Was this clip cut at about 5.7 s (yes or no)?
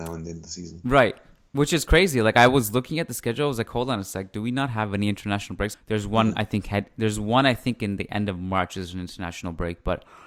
yes